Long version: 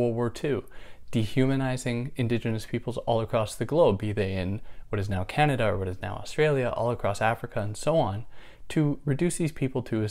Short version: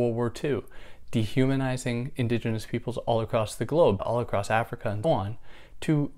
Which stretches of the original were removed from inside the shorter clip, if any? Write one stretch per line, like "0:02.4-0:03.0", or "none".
0:04.0-0:06.7
0:07.8-0:07.9